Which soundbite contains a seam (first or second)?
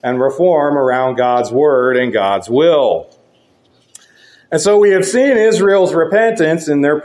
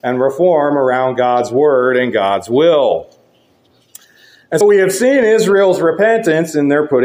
second